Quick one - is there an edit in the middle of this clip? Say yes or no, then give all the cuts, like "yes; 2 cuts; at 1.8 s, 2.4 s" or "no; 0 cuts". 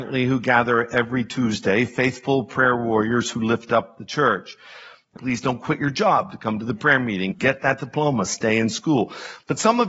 yes; 2 cuts; at 5.2 s, 7.3 s